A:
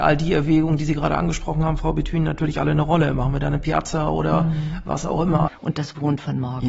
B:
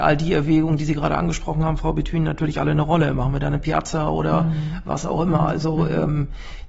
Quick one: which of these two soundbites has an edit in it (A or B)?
A